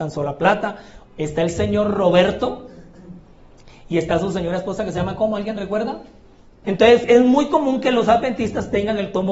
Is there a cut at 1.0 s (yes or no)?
yes